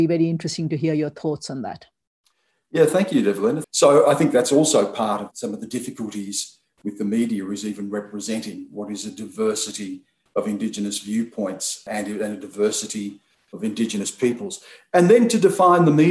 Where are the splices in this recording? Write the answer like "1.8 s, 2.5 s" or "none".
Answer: 3.6 s